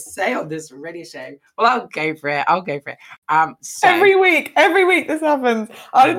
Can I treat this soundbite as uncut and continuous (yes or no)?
yes